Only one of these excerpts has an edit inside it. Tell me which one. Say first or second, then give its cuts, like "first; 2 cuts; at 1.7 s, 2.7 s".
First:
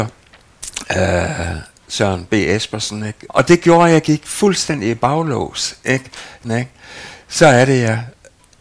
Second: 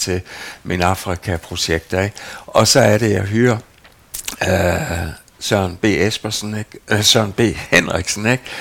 first; 2 cuts; at 3.3 s, 6.4 s